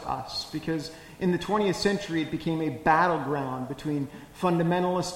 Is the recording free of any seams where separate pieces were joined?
yes; 0 cuts

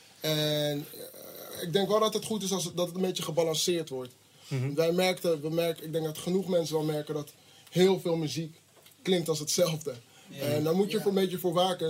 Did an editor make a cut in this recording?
no; 0 cuts

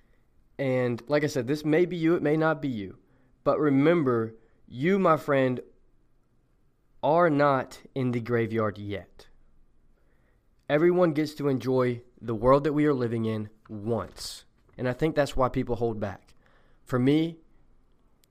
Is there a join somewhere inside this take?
yes; 1 cut; at 14.7 s

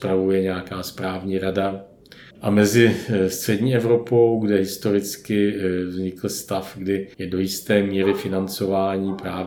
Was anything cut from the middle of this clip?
yes; 2 cuts; at 2.3 s, 7.1 s

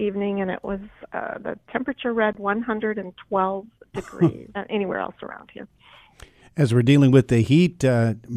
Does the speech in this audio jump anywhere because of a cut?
yes; 1 cut; at 4.5 s

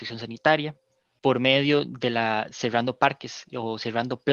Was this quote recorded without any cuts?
no; 1 cut; at 1.2 s

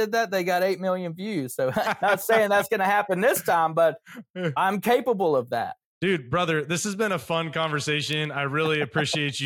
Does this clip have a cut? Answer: yes; 2 cuts; at 1.8 s, 5.9 s

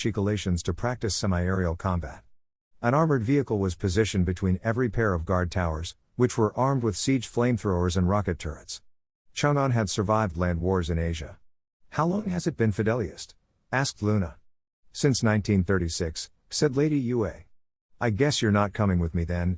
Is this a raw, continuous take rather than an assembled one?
yes; 0 cuts

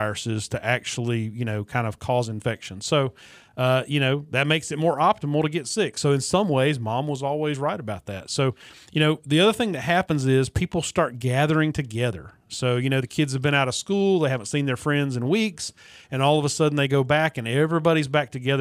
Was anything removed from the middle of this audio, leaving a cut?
no; 0 cuts

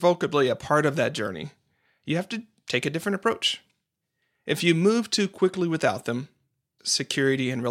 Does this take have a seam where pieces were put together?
yes; 1 cut; at 6.8 s

